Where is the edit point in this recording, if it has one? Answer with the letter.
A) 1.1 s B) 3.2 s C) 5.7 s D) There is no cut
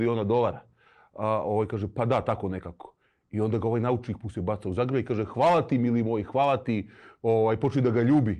D